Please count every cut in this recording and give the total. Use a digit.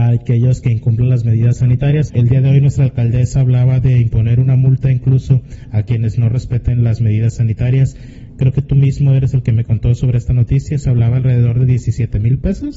1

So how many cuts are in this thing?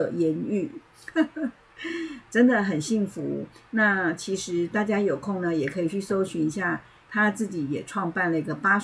0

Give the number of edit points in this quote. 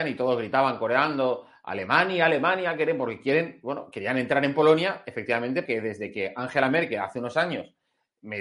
1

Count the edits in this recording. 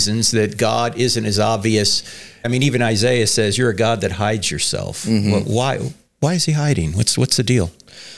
1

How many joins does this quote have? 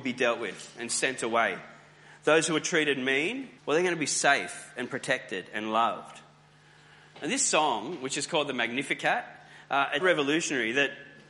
2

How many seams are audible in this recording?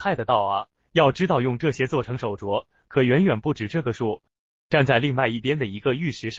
1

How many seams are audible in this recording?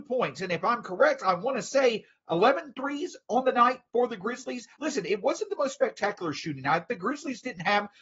1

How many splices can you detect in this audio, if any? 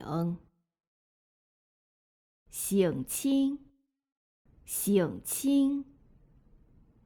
1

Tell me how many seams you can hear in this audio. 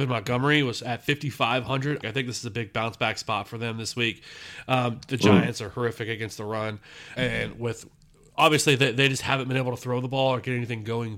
2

